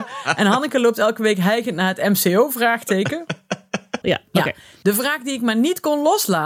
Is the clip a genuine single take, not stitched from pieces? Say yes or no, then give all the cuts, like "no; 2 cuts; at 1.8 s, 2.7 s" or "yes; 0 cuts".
no; 1 cut; at 4.0 s